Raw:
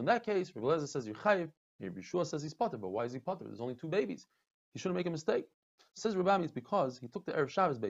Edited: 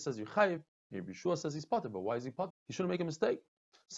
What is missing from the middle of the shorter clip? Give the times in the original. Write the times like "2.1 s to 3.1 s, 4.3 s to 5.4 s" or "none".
3.4 s to 4.6 s